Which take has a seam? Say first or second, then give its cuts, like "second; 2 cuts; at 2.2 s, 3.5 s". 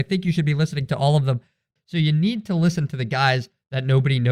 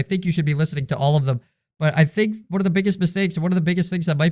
first; 1 cut; at 1.8 s